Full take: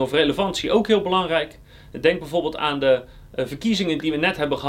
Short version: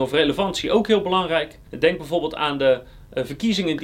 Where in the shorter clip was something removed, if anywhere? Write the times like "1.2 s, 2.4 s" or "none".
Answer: 1.7 s